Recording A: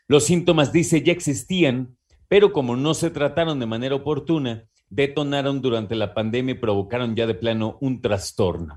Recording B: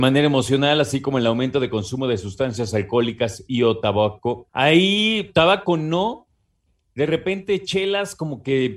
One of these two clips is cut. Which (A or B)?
B